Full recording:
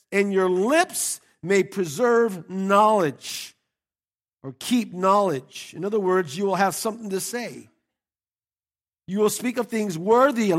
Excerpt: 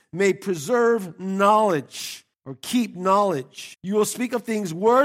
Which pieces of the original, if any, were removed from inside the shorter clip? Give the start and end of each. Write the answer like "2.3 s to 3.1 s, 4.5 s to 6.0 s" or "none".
3.6 s to 4.3 s, 5.7 s to 9.0 s